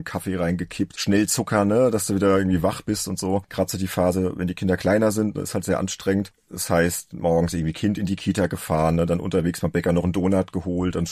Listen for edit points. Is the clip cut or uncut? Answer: cut